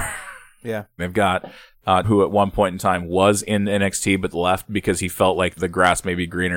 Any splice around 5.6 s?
yes; 3 cuts; at 1.0 s, 2.0 s, 5.6 s

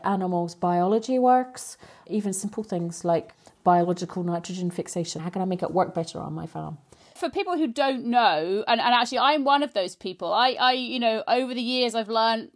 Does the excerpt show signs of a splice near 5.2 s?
yes; 1 cut; at 5.2 s

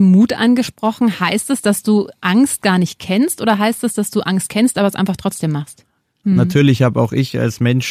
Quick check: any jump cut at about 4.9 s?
no; 1 cut; at 6.2 s

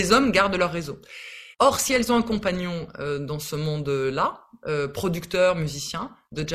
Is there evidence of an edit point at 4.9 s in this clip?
no; 1 cut; at 1.5 s

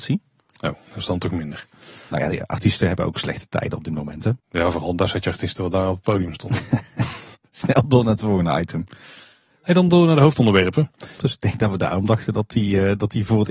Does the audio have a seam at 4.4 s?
yes; 2 cuts; at 4.4 s, 11.2 s

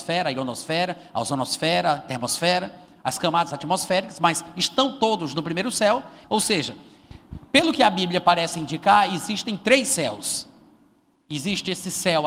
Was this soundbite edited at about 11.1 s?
no; 1 cut; at 6.2 s

